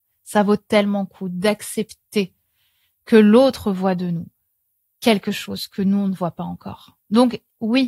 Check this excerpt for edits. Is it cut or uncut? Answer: uncut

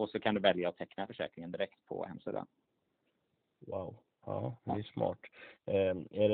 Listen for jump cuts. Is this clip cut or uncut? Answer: uncut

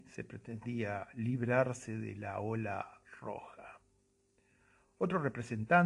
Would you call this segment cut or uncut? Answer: uncut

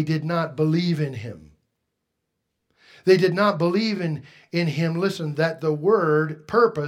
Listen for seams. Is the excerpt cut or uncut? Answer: uncut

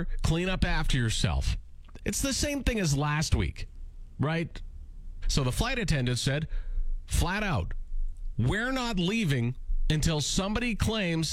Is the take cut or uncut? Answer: cut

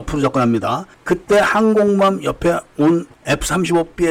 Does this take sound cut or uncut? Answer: uncut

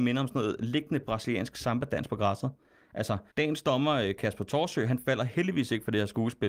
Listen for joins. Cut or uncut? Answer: cut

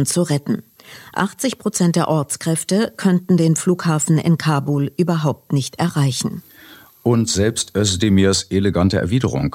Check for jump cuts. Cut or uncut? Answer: uncut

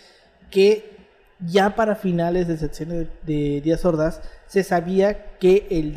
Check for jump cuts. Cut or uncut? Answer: uncut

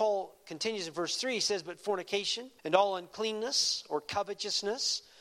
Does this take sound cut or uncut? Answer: cut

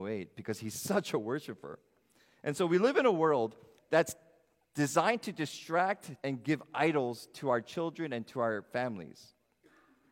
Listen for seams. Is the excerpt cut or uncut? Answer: cut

